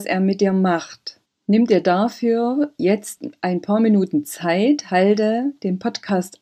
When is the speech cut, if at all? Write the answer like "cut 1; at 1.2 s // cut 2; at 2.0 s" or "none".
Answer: cut 1; at 1.2 s